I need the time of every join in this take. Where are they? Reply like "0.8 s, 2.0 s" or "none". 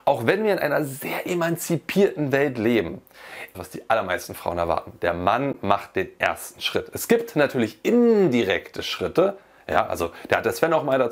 3.5 s